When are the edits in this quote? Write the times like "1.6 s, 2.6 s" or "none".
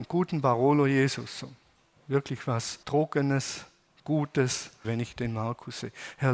2.8 s, 4.8 s

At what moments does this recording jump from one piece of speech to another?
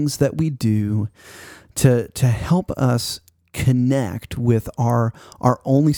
none

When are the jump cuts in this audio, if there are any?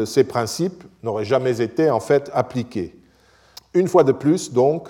3.6 s

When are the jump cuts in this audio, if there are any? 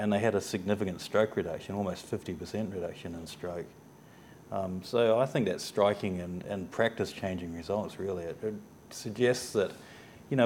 none

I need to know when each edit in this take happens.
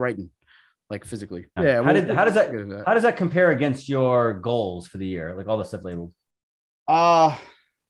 1.6 s, 5.8 s

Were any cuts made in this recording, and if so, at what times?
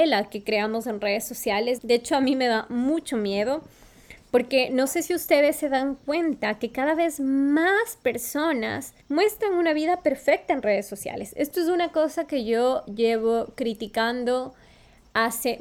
1.8 s, 9.0 s

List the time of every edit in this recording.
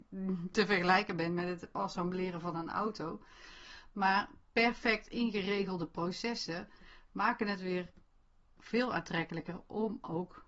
none

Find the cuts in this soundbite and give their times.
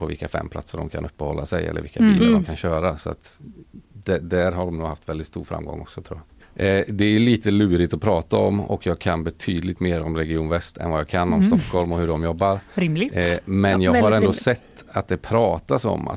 6.4 s

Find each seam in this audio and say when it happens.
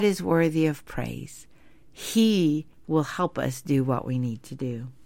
none

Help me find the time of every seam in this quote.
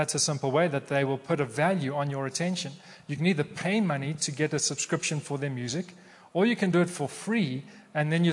none

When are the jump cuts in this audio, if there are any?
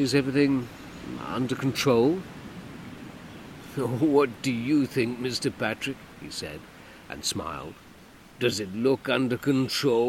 1.2 s

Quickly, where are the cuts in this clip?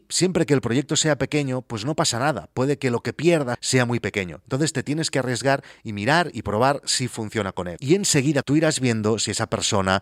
3.5 s, 8.4 s

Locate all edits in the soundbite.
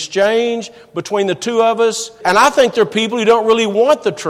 2.2 s

